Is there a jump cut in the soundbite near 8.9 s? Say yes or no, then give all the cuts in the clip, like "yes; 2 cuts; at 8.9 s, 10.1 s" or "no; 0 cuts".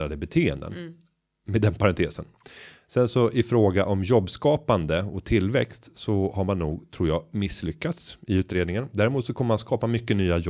no; 0 cuts